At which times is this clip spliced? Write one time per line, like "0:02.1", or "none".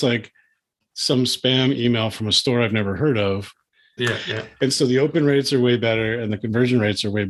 0:04.0